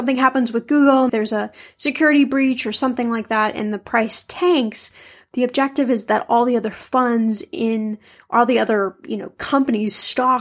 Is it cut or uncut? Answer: cut